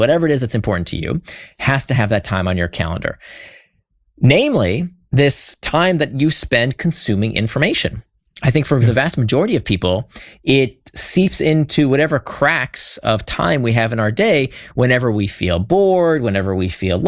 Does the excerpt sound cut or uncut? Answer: uncut